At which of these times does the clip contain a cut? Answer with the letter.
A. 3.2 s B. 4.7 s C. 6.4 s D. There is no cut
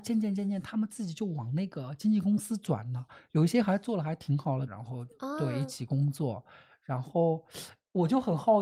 B